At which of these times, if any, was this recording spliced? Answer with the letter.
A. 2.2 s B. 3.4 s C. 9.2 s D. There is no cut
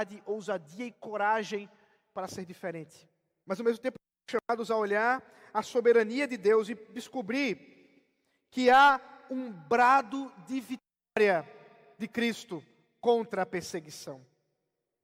B